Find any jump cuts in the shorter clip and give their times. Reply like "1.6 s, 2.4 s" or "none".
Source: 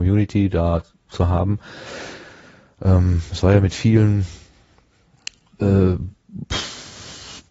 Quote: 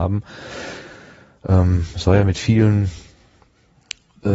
none